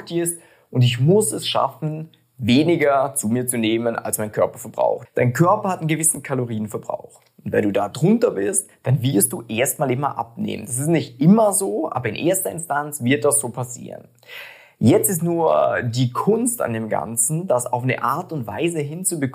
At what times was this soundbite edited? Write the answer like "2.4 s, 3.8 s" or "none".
5.1 s

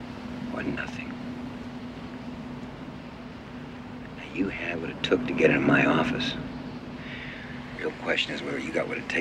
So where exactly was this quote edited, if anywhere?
none

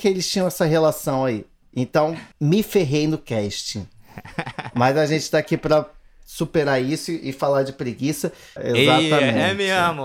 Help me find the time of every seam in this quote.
2.3 s, 8.6 s

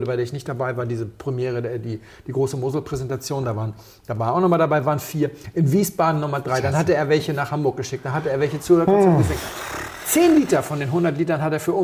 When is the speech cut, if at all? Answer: none

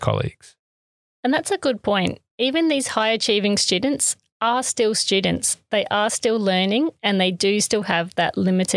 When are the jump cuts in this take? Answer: none

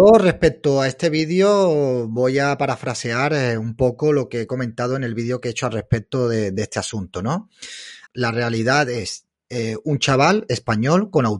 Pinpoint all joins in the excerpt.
8.1 s

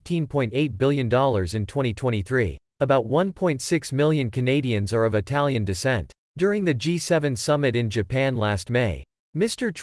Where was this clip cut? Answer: 2.7 s, 6.2 s

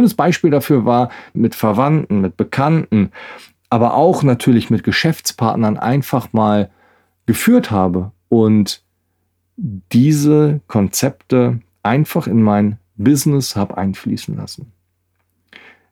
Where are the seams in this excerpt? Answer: 1.4 s, 11.7 s

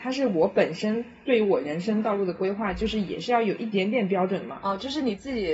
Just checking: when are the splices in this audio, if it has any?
none

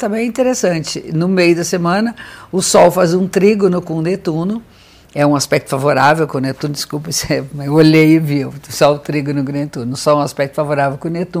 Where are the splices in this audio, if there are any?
none

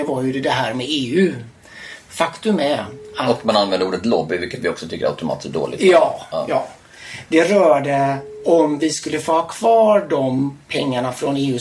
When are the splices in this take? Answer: none

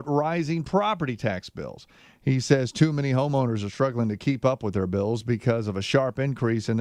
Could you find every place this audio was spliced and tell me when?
none

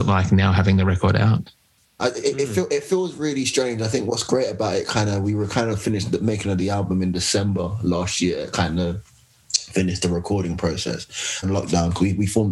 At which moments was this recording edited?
2.0 s, 11.4 s

